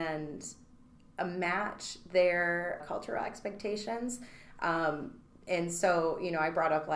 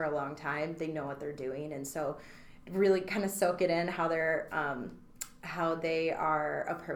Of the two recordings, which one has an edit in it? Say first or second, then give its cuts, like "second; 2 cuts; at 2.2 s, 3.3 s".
first; 1 cut; at 2.8 s